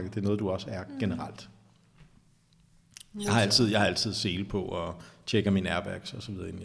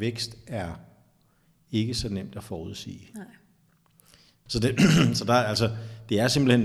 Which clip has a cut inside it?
second; 1 cut; at 4.5 s

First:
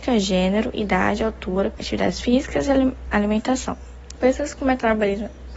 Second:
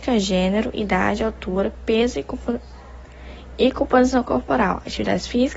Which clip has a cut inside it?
first; 2 cuts; at 1.8 s, 4.1 s

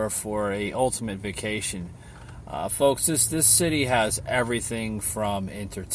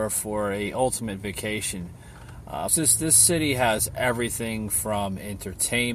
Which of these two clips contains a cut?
second; 1 cut; at 2.7 s

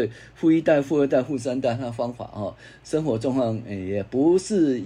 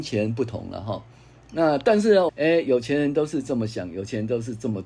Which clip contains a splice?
second; 1 cut; at 2.3 s

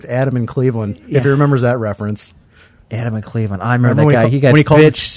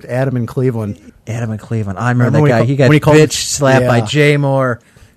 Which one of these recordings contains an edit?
second; 1 cut; at 1.1 s

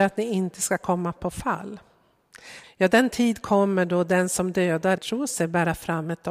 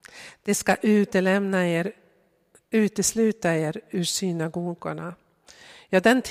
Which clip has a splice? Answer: first; 2 cuts; at 2.6 s, 5.0 s

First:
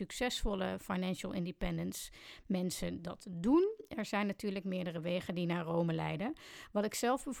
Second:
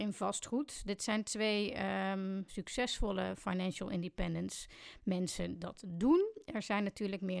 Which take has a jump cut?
second; 1 cut; at 2.5 s

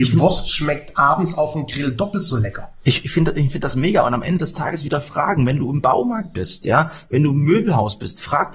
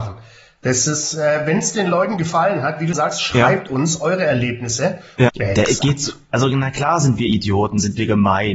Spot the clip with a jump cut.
second; 2 cuts; at 2.9 s, 5.3 s

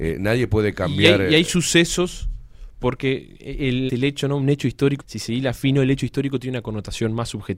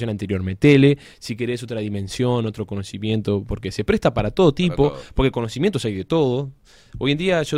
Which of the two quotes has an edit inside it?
first; 2 cuts; at 3.9 s, 5.0 s

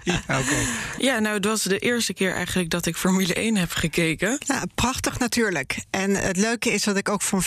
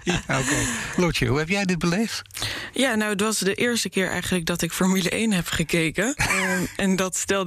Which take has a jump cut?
first; 2 cuts; at 1.0 s, 4.4 s

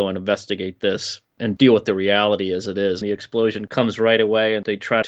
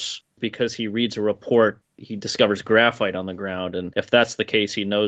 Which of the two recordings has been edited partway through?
first; 1 cut; at 3.0 s

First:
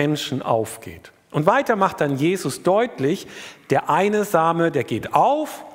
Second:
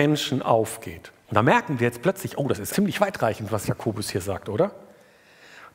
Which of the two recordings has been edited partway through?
second; 2 cuts; at 1.2 s, 2.7 s

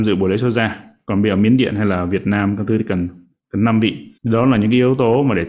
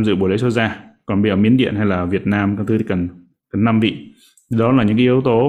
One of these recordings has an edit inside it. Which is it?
first; 1 cut; at 4.2 s

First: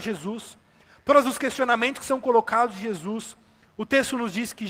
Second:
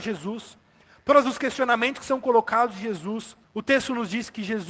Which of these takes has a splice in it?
second; 1 cut; at 3.4 s

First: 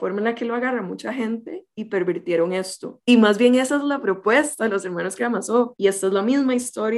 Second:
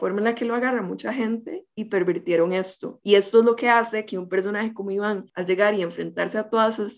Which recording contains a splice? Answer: first; 2 cuts; at 3.0 s, 5.8 s

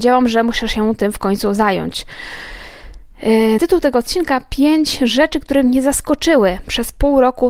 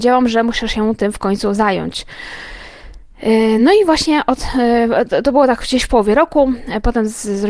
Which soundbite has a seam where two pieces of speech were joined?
first; 1 cut; at 3.6 s

